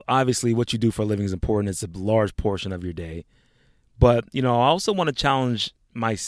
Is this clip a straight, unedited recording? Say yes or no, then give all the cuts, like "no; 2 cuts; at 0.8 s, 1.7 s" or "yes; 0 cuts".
yes; 0 cuts